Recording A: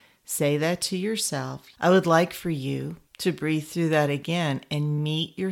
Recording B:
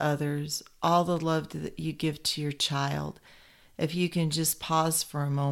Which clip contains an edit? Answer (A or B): A